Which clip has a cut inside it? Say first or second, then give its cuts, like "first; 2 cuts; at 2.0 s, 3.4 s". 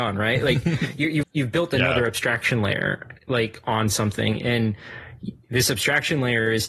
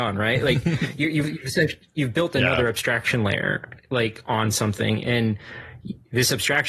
first; 1 cut; at 1.2 s